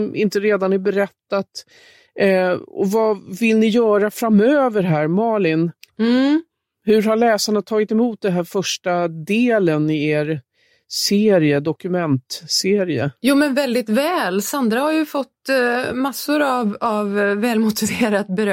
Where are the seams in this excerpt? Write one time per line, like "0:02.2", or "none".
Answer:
none